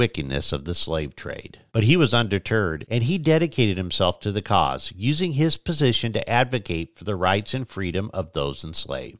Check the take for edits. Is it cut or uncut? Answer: cut